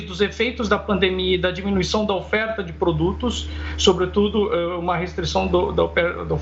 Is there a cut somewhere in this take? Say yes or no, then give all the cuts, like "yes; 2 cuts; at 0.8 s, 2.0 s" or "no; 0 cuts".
no; 0 cuts